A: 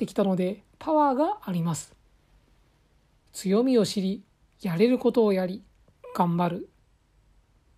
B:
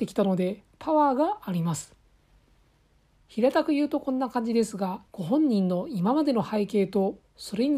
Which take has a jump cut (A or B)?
B